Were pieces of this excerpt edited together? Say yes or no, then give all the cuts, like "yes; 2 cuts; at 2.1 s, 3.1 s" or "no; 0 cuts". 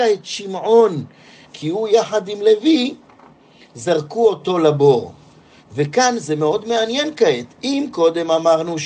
no; 0 cuts